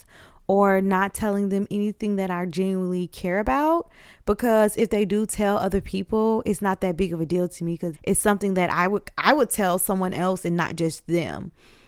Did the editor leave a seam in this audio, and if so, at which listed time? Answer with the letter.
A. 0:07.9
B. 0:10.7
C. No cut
A